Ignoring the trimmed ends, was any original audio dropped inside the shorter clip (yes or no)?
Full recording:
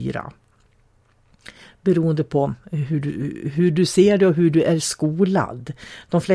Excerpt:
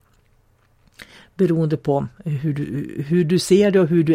no